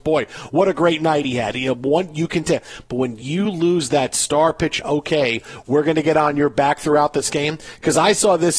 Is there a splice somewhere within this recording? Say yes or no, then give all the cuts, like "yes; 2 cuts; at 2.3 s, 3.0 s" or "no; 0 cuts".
yes; 1 cut; at 4.8 s